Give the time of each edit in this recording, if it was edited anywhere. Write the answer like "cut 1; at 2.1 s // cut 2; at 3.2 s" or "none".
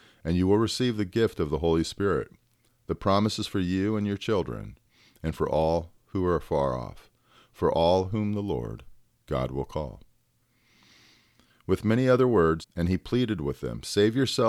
cut 1; at 12.6 s